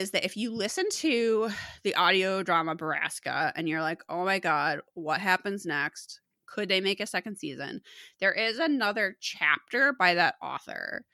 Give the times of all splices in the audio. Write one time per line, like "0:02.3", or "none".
none